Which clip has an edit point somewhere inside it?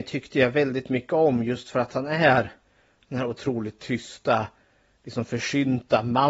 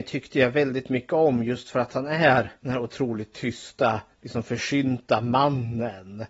second; 2 cuts; at 2.6 s, 4.1 s

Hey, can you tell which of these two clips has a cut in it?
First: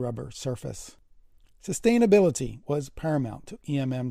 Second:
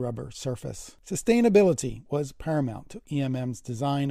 second; 1 cut; at 1.0 s

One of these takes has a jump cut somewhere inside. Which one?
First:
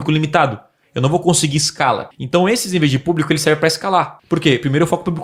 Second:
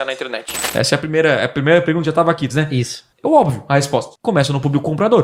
second; 1 cut; at 2.5 s

